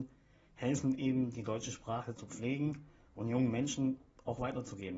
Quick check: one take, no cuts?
yes; 0 cuts

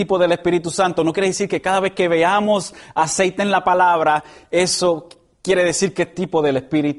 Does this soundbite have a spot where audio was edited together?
no; 0 cuts

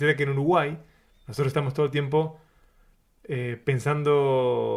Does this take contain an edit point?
no; 0 cuts

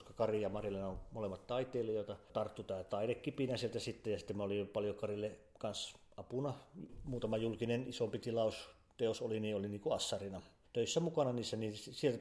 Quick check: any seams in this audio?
no; 0 cuts

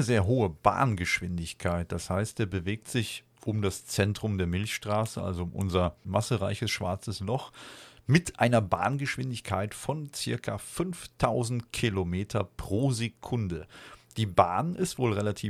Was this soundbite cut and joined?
no; 0 cuts

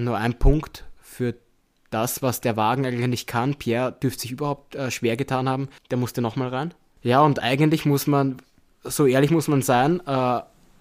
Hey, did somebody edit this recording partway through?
yes; 1 cut; at 5.8 s

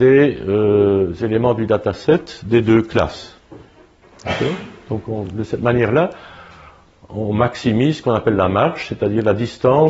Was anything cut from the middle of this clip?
no; 0 cuts

